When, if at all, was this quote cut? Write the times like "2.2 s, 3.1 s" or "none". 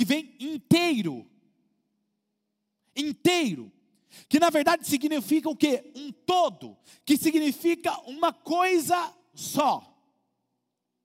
none